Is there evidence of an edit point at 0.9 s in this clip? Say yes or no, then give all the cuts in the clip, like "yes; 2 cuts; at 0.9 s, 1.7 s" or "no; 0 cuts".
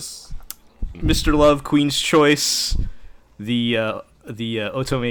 yes; 1 cut; at 0.9 s